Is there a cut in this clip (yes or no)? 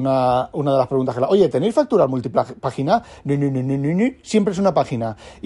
no